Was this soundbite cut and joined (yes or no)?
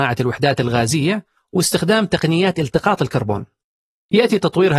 no